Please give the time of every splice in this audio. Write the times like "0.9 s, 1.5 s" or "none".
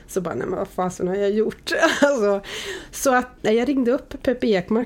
3.4 s